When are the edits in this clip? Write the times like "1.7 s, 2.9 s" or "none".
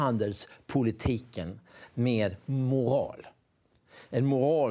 1.9 s